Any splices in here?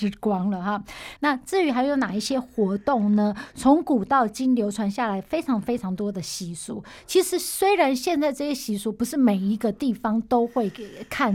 yes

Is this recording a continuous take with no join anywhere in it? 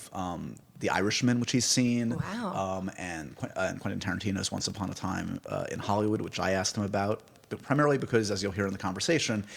yes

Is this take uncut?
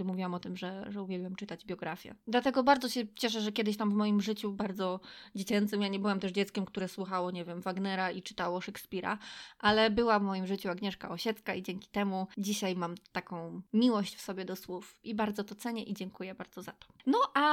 yes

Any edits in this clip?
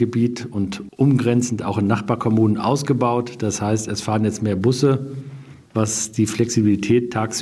yes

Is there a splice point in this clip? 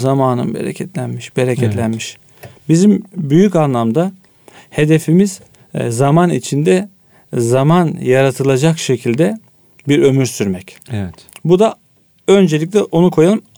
no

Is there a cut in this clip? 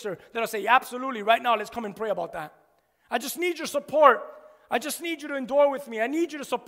no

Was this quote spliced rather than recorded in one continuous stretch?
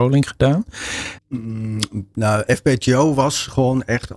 yes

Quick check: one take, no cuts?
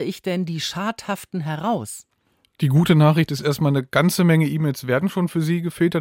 yes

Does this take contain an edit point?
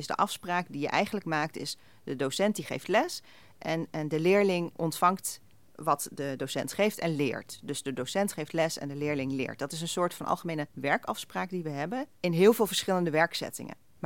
no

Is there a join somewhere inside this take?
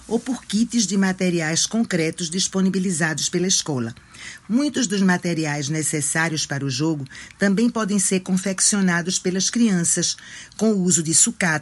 no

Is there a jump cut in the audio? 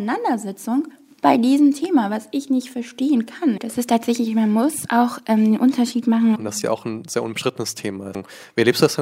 yes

